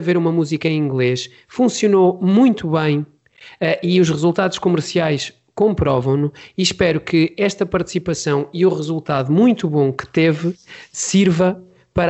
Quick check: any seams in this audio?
no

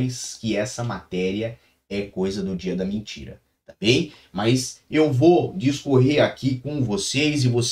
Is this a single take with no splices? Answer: yes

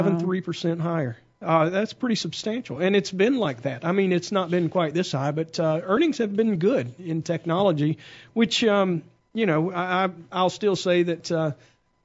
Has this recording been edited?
no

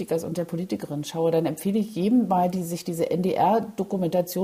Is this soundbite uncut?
yes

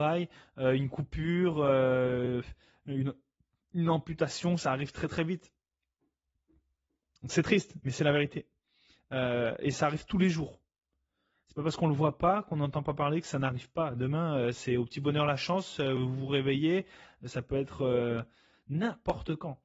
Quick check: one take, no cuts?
yes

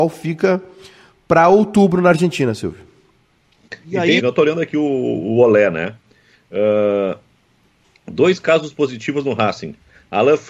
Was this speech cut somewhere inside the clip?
yes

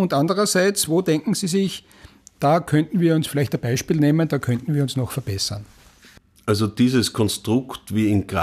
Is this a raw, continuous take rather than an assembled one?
yes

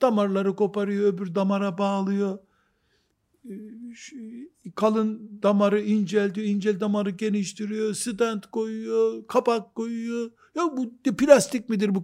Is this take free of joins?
yes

